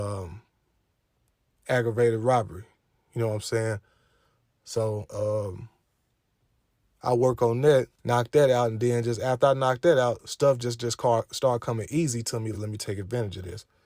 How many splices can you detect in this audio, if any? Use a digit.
2